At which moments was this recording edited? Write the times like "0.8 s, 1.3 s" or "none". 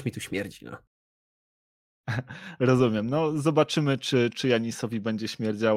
none